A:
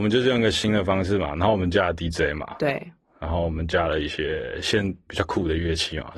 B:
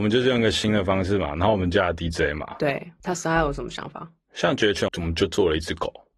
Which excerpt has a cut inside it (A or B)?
B